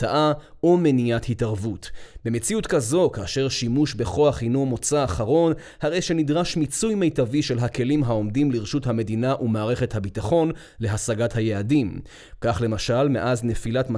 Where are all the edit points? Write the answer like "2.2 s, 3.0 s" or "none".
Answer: none